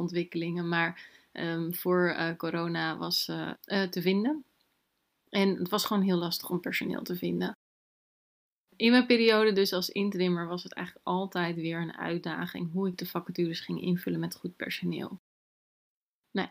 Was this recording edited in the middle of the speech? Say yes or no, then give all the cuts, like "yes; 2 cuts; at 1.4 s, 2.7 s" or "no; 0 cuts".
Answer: yes; 1 cut; at 3.5 s